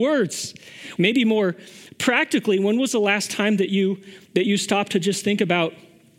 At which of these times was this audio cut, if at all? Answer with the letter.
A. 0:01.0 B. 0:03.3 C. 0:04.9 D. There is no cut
A